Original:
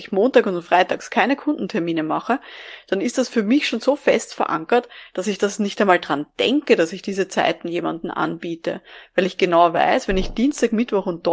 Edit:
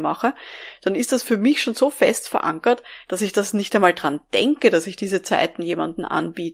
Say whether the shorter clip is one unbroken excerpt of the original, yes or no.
yes